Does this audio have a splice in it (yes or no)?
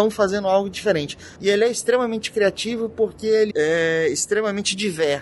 yes